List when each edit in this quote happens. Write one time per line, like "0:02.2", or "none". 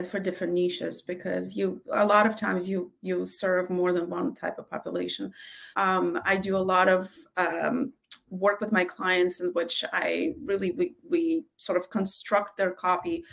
0:05.7